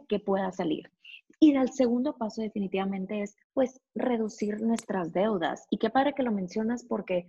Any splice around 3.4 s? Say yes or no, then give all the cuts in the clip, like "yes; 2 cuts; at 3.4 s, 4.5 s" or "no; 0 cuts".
yes; 1 cut; at 3.4 s